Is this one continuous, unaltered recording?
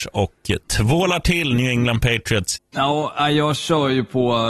no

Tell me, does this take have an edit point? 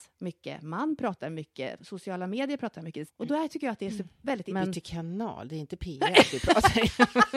yes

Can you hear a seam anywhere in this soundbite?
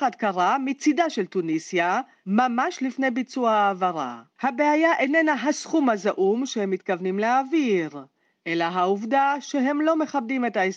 yes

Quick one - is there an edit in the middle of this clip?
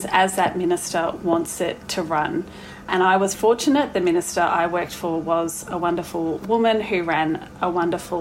yes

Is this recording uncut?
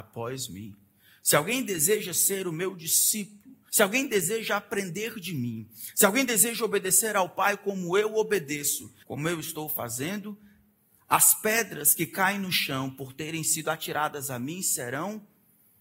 no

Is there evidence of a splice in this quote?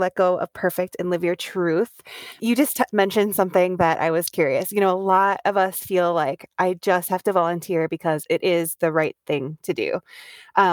yes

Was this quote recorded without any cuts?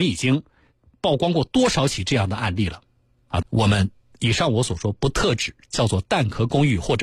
no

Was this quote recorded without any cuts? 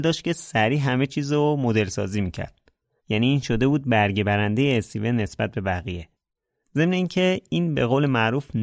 no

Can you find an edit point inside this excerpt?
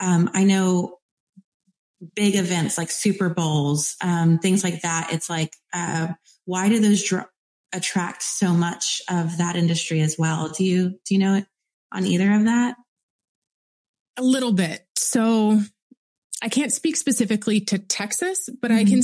no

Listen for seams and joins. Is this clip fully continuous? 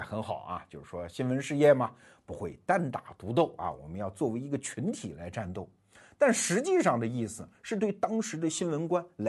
yes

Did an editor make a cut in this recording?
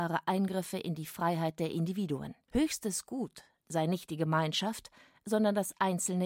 yes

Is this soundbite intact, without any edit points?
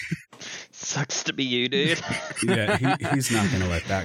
yes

